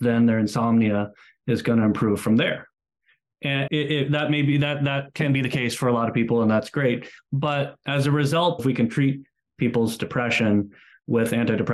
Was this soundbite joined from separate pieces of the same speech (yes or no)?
yes